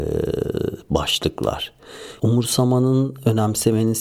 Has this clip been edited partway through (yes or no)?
yes